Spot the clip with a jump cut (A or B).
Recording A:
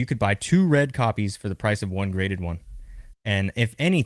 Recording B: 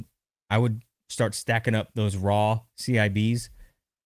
A